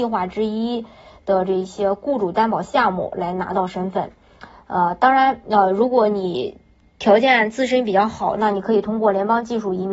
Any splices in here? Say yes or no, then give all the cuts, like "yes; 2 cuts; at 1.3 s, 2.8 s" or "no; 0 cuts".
no; 0 cuts